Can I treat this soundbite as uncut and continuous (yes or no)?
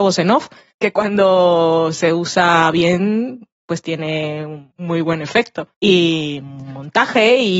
yes